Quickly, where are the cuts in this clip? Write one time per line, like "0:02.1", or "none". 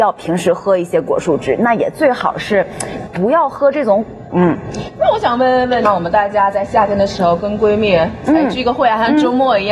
0:04.3
0:05.8